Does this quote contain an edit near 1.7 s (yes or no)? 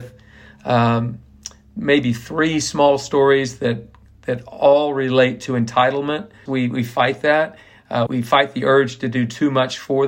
no